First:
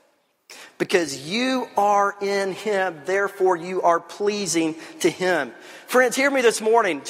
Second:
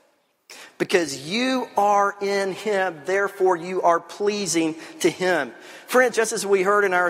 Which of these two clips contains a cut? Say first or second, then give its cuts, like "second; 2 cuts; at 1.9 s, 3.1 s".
second; 1 cut; at 6.1 s